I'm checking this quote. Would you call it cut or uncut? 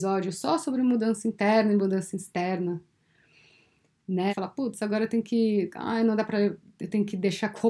cut